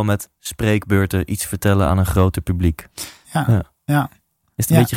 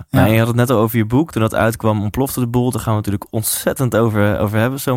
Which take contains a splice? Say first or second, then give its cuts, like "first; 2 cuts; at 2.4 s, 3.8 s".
first; 1 cut; at 3.2 s